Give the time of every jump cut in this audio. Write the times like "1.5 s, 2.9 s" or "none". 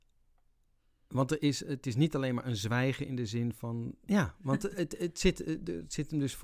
4.1 s